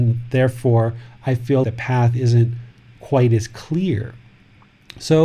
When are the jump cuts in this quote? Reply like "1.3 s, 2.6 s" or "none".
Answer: 1.6 s